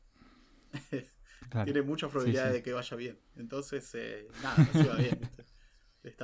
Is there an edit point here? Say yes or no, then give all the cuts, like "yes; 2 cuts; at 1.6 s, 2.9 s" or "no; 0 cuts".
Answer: no; 0 cuts